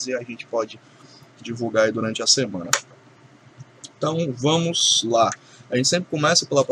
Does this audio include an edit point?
no; 0 cuts

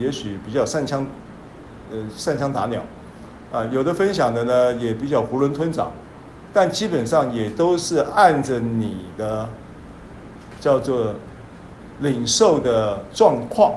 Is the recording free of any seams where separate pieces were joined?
yes; 0 cuts

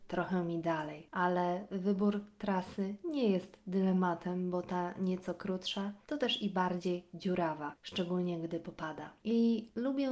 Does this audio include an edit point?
yes; 1 cut; at 9.2 s

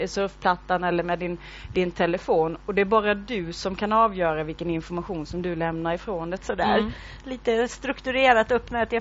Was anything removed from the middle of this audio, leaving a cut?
yes; 1 cut; at 6.4 s

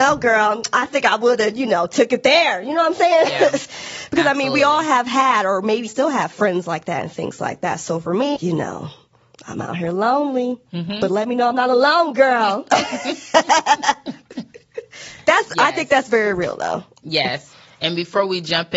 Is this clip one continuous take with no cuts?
no; 2 cuts; at 5.9 s, 8.4 s

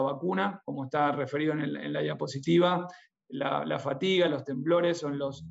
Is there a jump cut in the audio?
yes; 2 cuts; at 3.2 s, 4.3 s

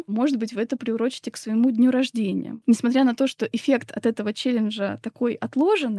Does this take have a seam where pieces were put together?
no; 0 cuts

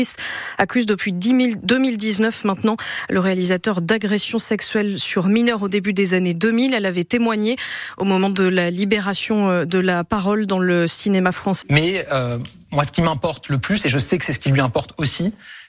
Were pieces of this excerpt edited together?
yes; 1 cut; at 11.6 s

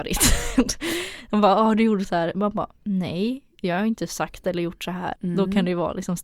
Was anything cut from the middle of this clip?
yes; 2 cuts; at 2.0 s, 5.2 s

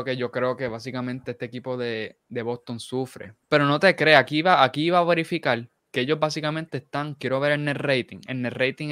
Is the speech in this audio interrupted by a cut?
yes; 1 cut; at 3.4 s

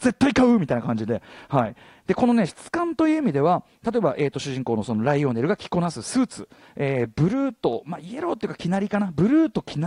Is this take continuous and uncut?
yes; 0 cuts

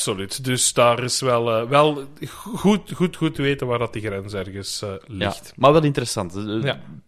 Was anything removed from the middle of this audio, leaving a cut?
no; 0 cuts

